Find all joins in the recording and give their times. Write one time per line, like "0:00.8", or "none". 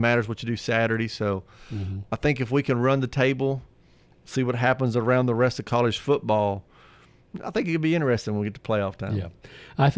none